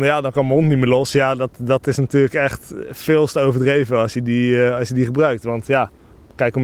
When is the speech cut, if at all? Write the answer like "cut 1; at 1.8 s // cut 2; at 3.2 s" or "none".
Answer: none